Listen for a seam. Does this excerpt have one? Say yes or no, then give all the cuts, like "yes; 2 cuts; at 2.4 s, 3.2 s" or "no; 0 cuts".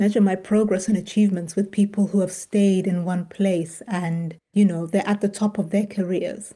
yes; 1 cut; at 4.5 s